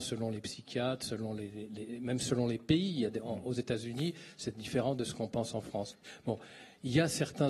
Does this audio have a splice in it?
no; 0 cuts

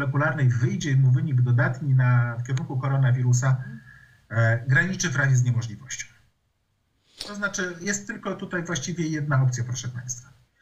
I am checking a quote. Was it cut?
no; 0 cuts

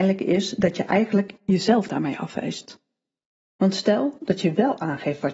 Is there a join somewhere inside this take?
yes; 1 cut; at 3.4 s

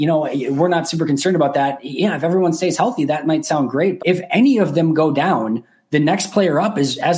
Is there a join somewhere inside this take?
yes; 1 cut; at 4.0 s

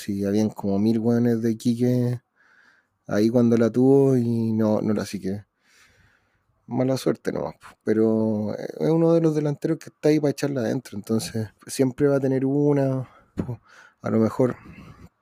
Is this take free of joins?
no; 3 cuts; at 4.9 s, 11.6 s, 13.3 s

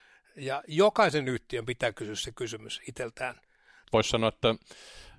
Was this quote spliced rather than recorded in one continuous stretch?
yes; 1 cut; at 3.8 s

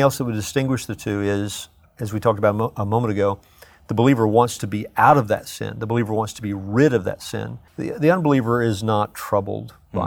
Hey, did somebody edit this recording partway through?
yes; 1 cut; at 7.7 s

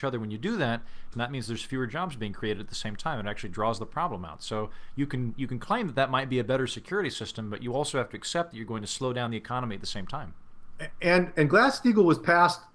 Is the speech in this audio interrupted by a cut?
yes; 1 cut; at 1.1 s

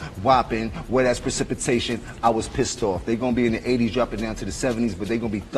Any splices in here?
no; 0 cuts

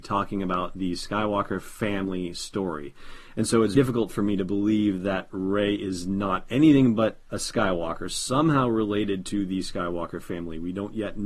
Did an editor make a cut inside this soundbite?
yes; 1 cut; at 3.7 s

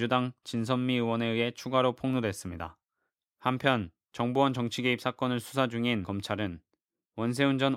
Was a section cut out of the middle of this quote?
no; 0 cuts

